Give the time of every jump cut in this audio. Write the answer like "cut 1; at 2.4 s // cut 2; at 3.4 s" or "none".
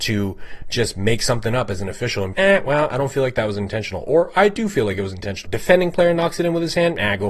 cut 1; at 2.3 s // cut 2; at 5.4 s